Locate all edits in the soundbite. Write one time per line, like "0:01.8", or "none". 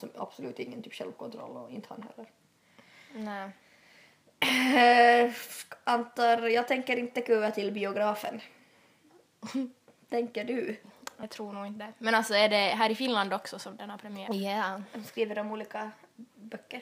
0:11.2
0:14.3